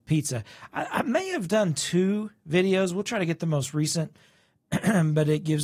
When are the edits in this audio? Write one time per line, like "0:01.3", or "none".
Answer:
none